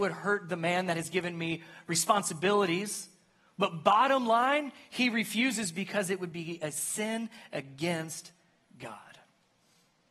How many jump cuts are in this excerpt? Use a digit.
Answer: 0